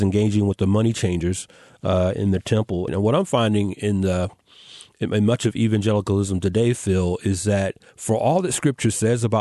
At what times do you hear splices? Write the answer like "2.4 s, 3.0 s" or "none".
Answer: 2.9 s